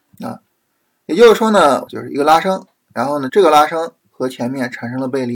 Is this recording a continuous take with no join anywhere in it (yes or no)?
no